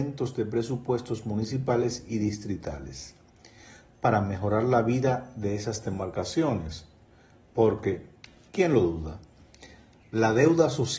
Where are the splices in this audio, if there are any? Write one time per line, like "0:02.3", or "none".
none